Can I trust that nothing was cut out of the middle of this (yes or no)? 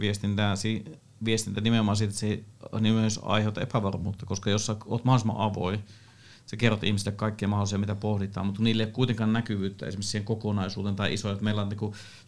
yes